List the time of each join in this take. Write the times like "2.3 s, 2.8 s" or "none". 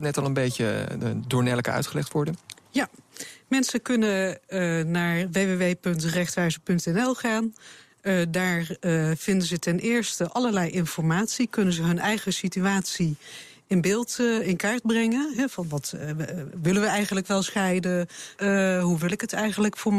18.4 s